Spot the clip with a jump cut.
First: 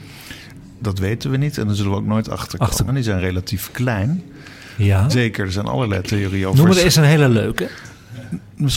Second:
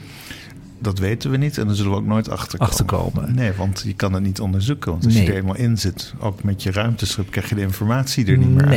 first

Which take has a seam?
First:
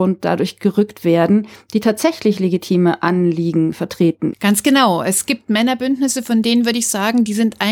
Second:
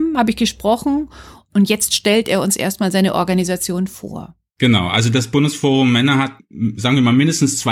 first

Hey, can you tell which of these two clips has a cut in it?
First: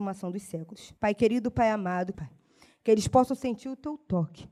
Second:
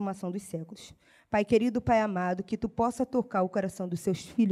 first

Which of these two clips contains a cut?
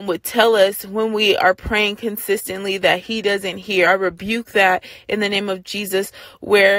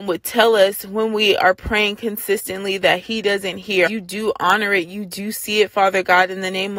second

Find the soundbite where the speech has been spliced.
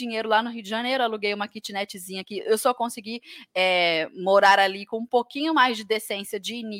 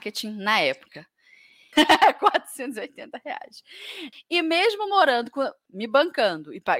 second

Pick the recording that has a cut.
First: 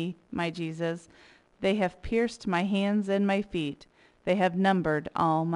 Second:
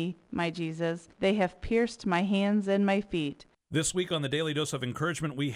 second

